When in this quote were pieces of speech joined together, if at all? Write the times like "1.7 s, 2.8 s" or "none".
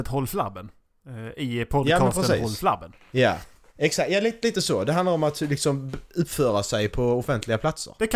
none